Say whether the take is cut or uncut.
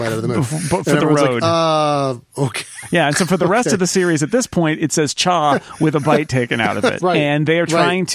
cut